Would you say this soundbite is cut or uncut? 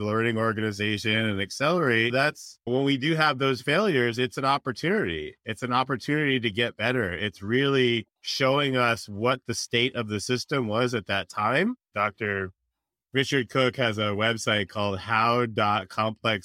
cut